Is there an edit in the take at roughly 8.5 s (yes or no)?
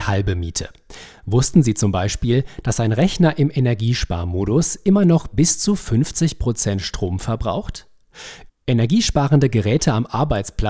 yes